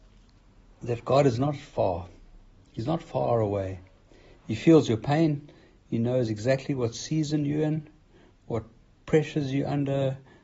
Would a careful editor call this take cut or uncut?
uncut